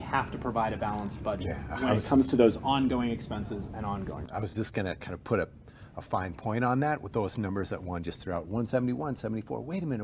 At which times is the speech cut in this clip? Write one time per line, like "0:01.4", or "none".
none